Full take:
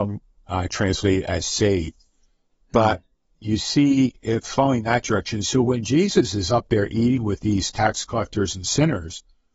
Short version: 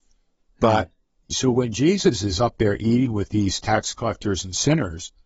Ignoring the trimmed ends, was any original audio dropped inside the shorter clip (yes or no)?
yes